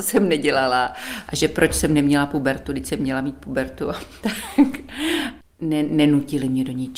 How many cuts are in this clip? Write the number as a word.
one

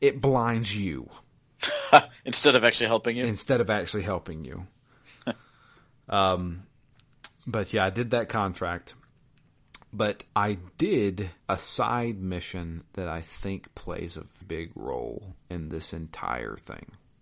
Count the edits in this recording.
three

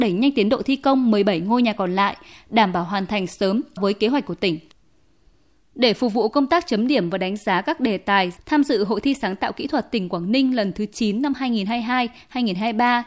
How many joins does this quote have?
two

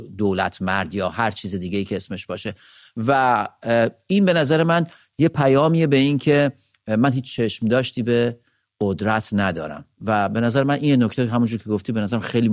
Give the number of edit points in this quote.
zero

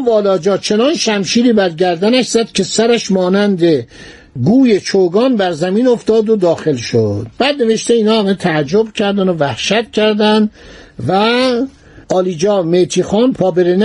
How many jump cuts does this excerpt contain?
two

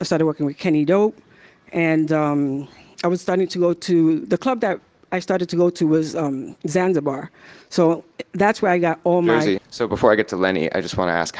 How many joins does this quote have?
one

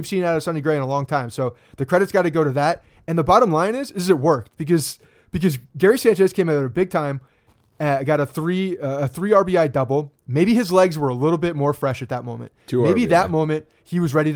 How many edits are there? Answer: zero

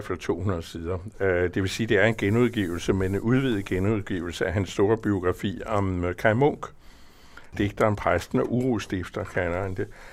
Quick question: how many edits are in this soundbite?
one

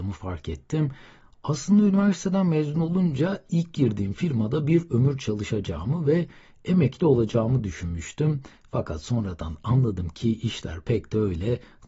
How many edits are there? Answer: zero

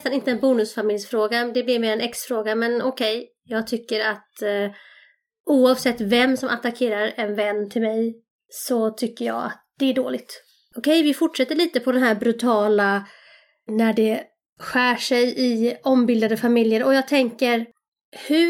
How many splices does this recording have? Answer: one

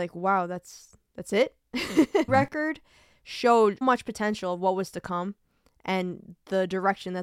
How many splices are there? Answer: two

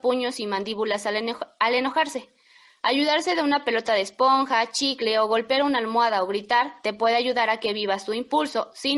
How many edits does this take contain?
zero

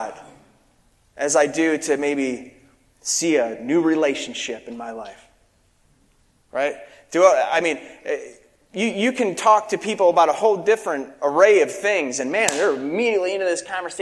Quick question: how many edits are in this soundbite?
zero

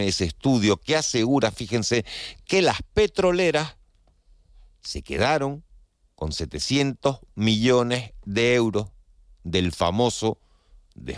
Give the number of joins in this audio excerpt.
zero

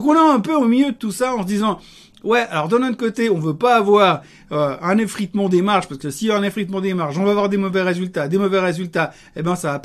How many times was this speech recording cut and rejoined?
zero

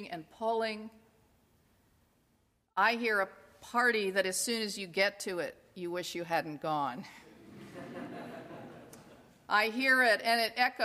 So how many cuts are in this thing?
zero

